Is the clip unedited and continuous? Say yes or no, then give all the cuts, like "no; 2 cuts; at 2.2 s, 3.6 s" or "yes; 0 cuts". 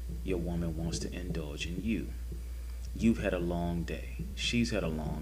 yes; 0 cuts